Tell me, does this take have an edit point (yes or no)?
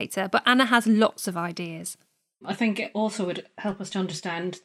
no